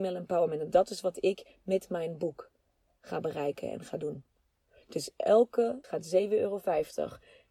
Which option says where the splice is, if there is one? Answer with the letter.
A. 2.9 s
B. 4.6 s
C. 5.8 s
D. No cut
C